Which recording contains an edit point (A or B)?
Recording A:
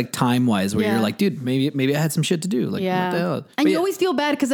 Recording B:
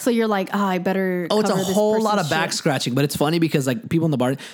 A